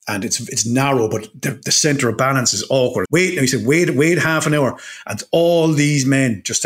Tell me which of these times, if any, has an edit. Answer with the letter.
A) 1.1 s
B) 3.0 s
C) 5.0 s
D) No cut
B